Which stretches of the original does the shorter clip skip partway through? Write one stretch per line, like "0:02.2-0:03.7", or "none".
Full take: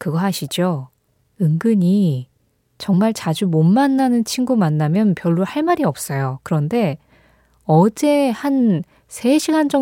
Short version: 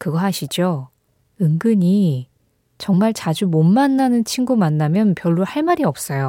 none

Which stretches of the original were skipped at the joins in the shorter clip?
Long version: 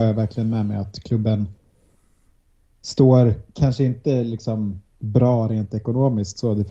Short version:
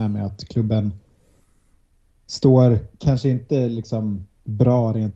none

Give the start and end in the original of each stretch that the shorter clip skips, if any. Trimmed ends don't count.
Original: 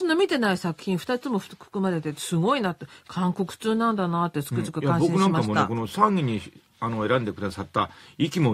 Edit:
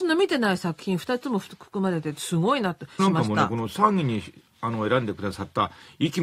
0:03.0-0:05.2

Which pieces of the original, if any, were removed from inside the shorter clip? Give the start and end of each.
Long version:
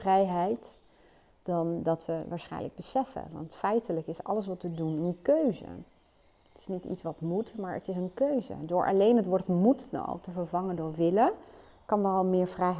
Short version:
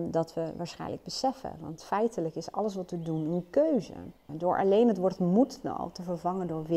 0:06.0-0:08.6

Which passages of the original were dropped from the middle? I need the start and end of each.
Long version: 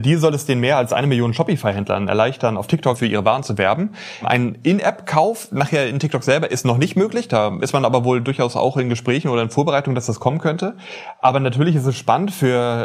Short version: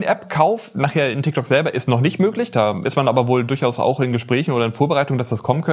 none

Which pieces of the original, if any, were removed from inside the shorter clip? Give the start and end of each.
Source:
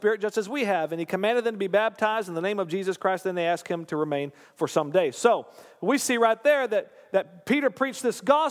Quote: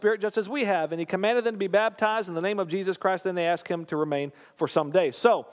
none

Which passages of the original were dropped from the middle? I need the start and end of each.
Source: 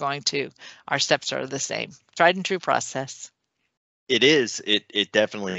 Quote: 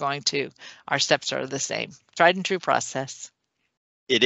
none

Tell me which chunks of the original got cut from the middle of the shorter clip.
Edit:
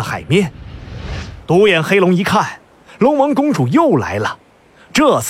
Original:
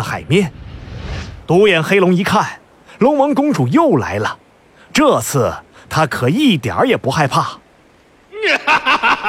none

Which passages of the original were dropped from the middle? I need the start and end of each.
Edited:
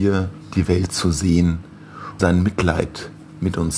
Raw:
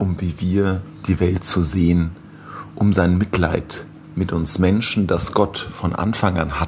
0:02.7-0:02.9

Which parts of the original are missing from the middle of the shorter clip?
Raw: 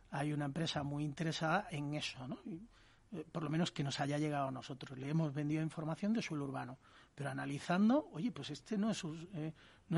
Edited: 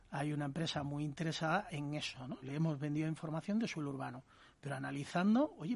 0:02.4-0:05.0

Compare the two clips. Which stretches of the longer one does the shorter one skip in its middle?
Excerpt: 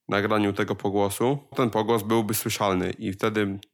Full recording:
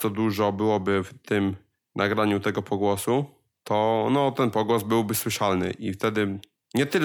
0:03.4-0:04.3

